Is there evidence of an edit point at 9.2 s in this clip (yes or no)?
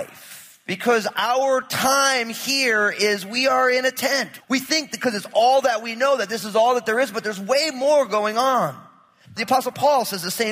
yes